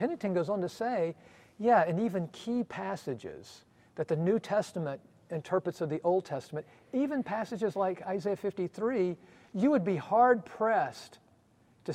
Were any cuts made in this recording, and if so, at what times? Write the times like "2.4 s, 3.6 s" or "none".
none